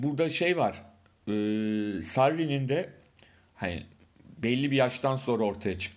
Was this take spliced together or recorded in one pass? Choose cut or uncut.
uncut